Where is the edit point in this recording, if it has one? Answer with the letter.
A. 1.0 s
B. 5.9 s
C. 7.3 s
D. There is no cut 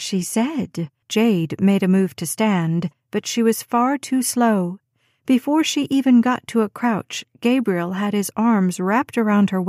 A